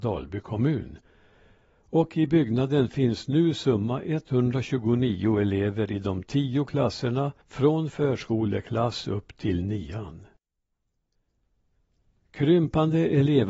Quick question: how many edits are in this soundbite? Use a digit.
1